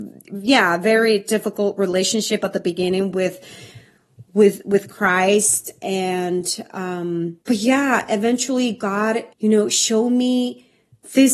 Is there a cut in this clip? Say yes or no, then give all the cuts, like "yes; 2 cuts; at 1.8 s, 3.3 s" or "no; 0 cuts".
yes; 2 cuts; at 7.4 s, 9.3 s